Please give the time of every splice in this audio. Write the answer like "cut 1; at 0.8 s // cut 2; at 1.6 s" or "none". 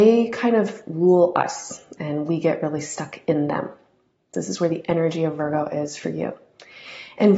cut 1; at 4.3 s

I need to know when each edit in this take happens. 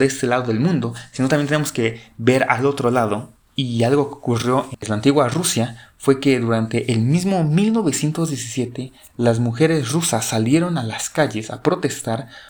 none

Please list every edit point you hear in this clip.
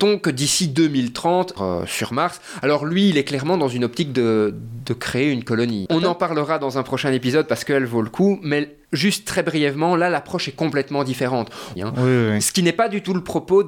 cut 1; at 1.6 s // cut 2; at 5.9 s // cut 3; at 11.8 s

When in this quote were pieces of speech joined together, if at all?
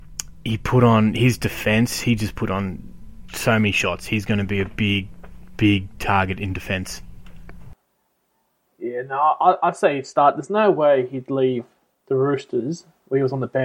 none

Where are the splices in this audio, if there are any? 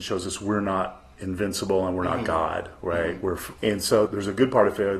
cut 1; at 3.6 s

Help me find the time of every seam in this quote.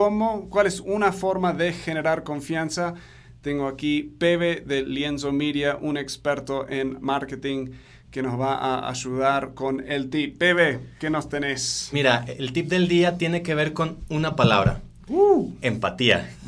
cut 1; at 11.9 s

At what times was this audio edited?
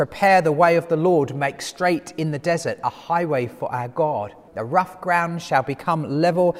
cut 1; at 4.5 s

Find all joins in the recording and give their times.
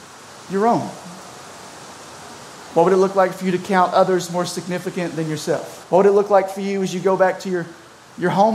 cut 1; at 5.8 s

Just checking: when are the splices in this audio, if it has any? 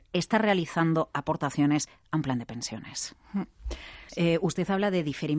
cut 1; at 4.1 s

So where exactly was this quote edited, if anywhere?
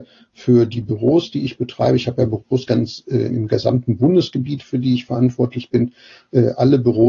cut 1; at 3.3 s

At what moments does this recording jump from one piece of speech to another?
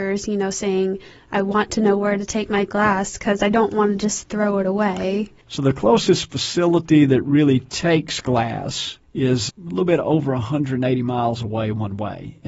cut 1; at 9.0 s

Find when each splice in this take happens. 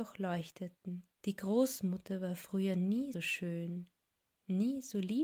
cut 1; at 1.2 s // cut 2; at 3.1 s

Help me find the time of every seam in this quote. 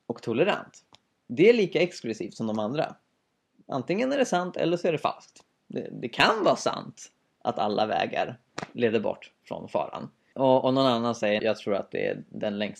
cut 1; at 10.3 s // cut 2; at 11.4 s

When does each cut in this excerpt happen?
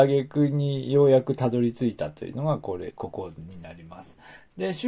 none

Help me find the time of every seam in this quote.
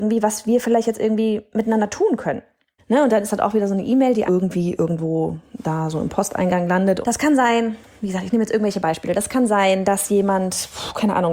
cut 1; at 2.8 s // cut 2; at 4.3 s // cut 3; at 7.0 s

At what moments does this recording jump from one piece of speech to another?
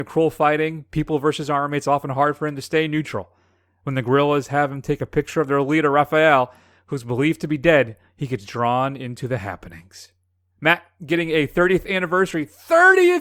none

